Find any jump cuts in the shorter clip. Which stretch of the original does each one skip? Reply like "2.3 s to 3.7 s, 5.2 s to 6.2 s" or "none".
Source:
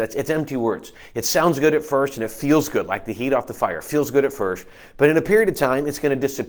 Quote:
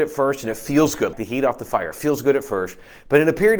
2.9 s to 3.0 s

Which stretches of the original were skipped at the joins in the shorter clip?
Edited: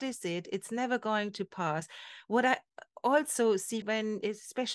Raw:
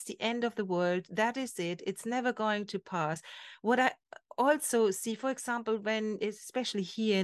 5.2 s to 5.8 s

